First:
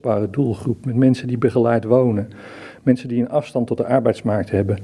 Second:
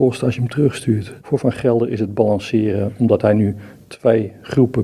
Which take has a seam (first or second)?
second